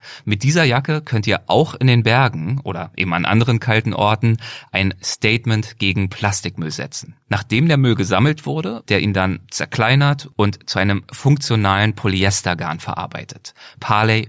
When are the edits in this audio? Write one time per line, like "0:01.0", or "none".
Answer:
0:07.2
0:08.8